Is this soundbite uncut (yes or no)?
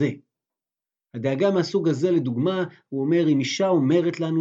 yes